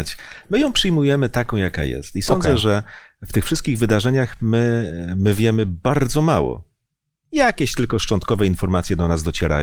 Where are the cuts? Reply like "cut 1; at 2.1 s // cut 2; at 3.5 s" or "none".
none